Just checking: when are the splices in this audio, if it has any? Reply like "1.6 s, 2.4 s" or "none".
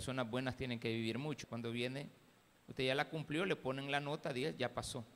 1.4 s

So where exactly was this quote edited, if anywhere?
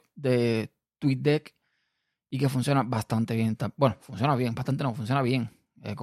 none

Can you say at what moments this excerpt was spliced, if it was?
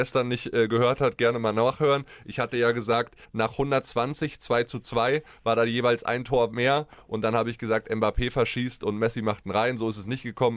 3.2 s

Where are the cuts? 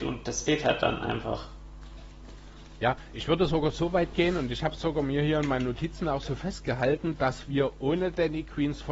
none

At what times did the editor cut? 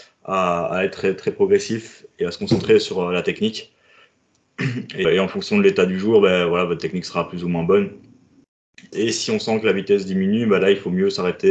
5.0 s, 8.9 s

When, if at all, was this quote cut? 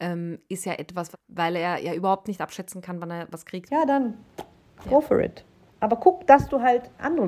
1.1 s, 3.7 s

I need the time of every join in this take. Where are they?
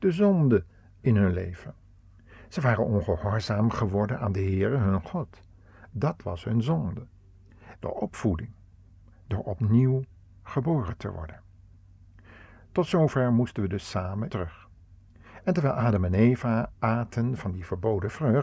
7.8 s, 14.3 s

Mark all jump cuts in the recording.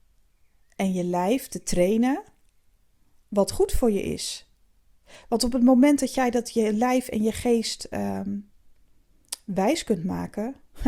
none

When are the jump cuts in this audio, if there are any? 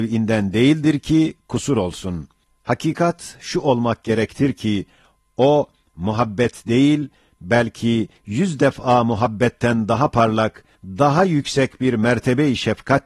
2.4 s, 10.8 s

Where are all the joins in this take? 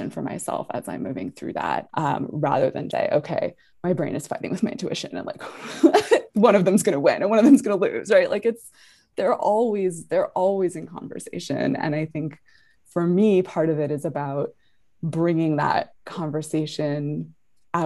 1.9 s, 2.9 s

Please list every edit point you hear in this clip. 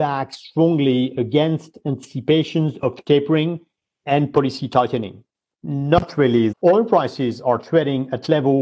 5.5 s, 6.5 s

